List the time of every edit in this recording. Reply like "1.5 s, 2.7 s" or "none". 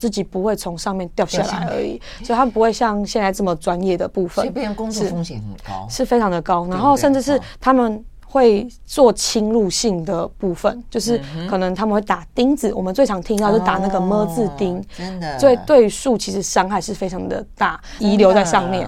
18.0 s